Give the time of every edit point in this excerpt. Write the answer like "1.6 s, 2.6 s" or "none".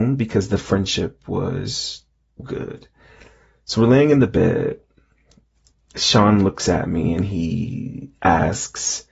2.4 s